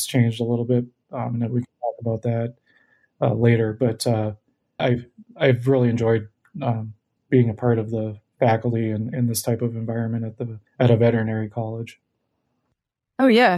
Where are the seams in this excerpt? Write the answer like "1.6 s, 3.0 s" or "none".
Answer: 4.8 s, 7.2 s, 10.7 s